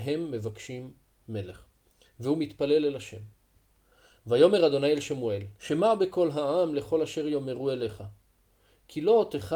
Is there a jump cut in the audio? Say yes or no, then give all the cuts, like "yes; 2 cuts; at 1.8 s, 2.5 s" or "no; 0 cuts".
yes; 1 cut; at 5.6 s